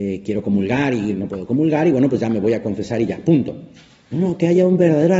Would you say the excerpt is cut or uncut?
uncut